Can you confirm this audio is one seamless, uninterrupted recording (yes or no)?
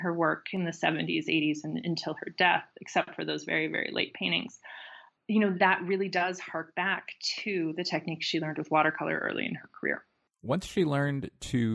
yes